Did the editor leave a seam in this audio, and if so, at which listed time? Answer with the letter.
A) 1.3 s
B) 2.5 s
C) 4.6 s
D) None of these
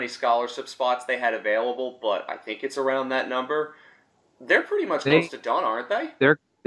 D